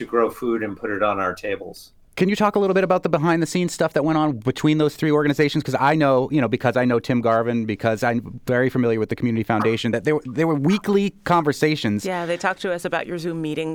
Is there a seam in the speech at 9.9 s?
no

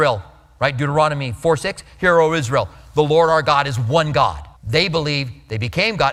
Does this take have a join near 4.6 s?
yes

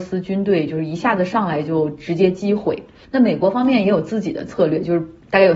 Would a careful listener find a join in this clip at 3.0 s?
yes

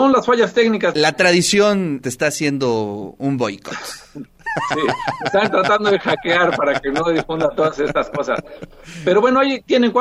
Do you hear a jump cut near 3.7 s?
no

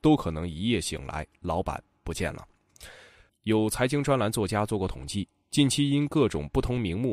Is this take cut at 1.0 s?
no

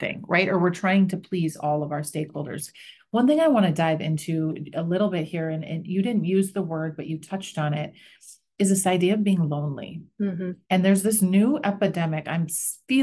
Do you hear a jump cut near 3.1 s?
no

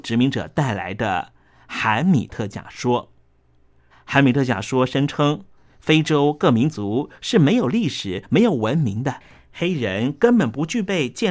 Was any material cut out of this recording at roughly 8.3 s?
no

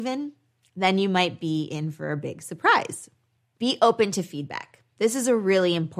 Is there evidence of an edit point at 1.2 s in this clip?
no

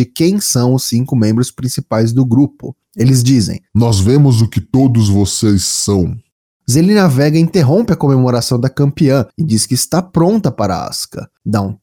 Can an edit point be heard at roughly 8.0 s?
no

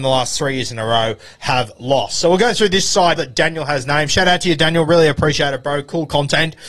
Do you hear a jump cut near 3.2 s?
yes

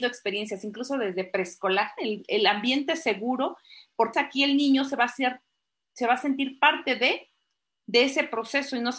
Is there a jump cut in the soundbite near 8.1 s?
no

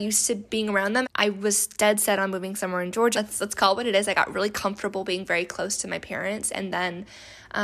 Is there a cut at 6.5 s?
no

